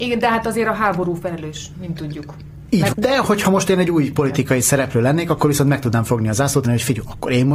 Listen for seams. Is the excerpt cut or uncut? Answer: cut